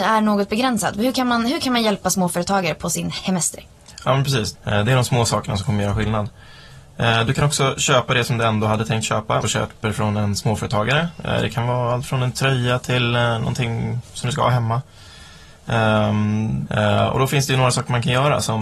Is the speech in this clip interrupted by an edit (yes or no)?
yes